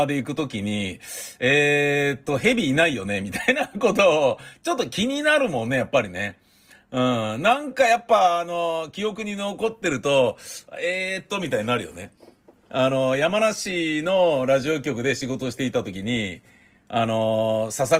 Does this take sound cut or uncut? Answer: uncut